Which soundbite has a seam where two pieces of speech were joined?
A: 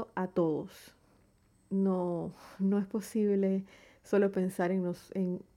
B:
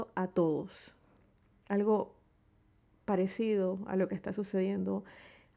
A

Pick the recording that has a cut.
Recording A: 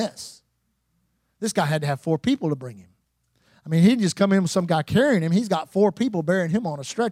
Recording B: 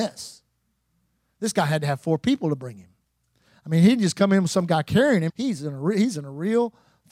B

